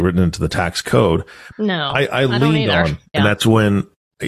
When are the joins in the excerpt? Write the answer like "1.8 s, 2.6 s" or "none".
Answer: 1.5 s, 3.1 s